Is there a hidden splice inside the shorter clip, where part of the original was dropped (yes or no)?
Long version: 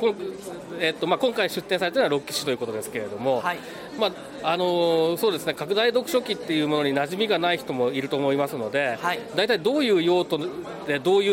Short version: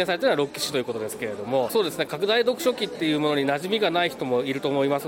yes